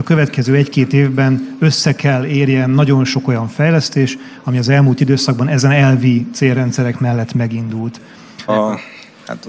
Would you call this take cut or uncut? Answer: cut